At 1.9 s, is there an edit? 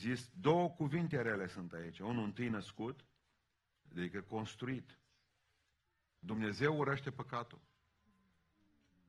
no; 2 cuts; at 3.9 s, 6.2 s

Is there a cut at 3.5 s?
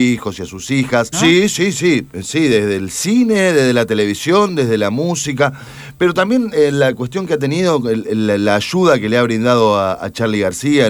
no; 1 cut; at 1.1 s

